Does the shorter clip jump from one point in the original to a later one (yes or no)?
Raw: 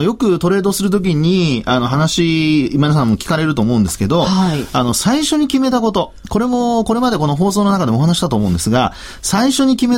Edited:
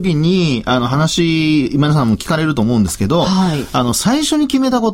no